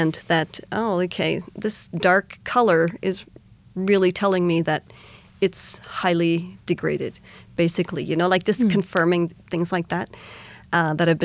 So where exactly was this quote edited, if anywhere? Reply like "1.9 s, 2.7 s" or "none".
none